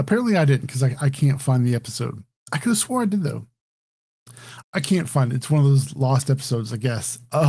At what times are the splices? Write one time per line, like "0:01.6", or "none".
0:04.6